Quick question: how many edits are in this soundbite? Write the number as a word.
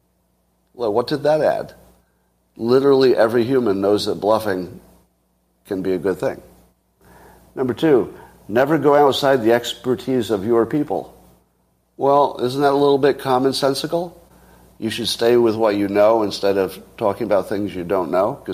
zero